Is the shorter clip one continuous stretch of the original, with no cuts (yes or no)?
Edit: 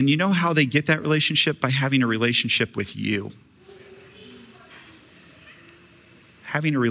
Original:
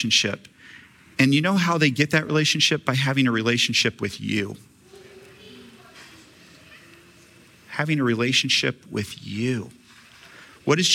yes